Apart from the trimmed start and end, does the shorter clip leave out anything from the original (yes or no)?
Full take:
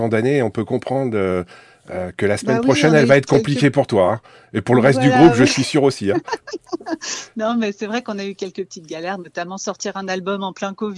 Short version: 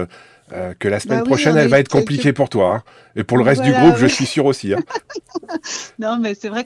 no